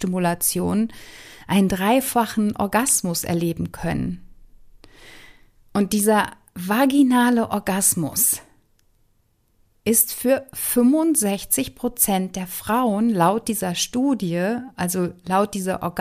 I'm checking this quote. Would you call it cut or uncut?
uncut